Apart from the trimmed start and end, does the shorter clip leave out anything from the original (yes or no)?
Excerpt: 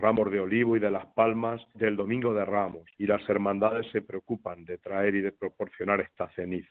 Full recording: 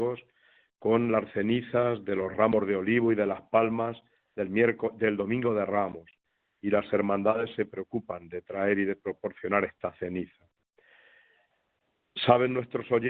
yes